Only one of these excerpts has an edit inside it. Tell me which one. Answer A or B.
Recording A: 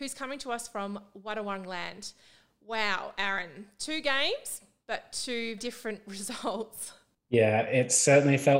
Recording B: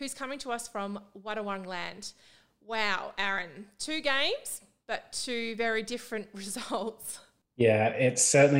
A